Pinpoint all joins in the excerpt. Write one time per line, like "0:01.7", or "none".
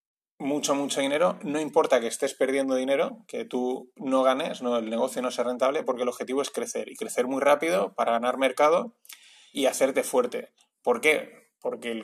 0:09.5